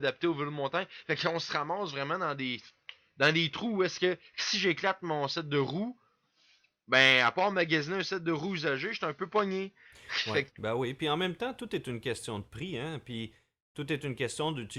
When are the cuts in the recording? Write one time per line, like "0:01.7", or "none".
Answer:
0:10.5

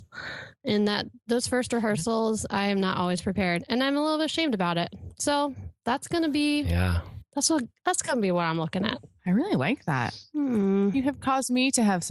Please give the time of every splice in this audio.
none

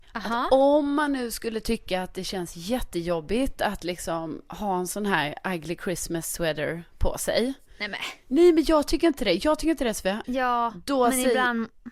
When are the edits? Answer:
0:10.2

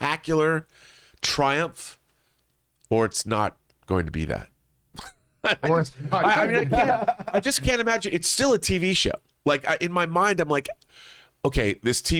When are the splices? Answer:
none

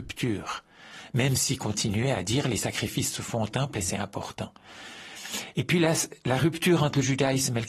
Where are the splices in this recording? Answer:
none

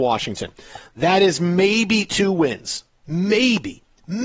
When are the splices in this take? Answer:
none

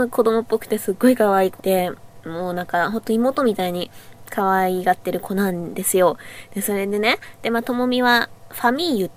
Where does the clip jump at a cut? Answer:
0:01.6

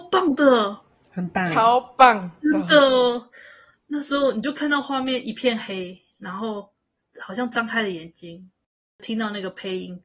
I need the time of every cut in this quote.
none

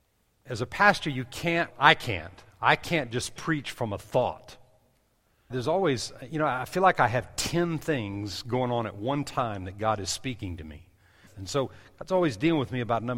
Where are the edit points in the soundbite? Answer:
0:01.7
0:05.5
0:11.3

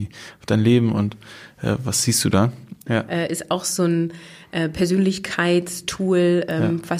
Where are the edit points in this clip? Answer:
0:02.9

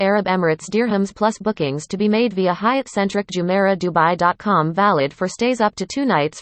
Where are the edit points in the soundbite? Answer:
0:01.1

